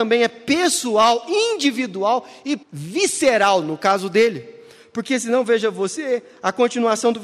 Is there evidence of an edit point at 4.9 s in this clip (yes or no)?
no